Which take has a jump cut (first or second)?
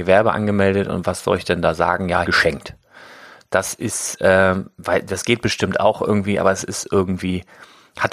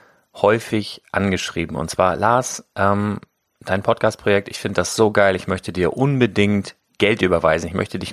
first